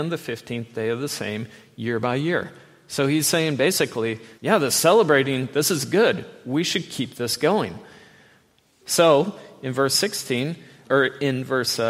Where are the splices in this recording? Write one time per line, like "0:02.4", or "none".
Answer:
0:04.4
0:08.8
0:10.8